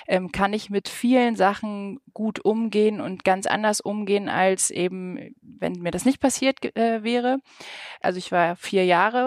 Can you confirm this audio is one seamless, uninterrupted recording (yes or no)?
no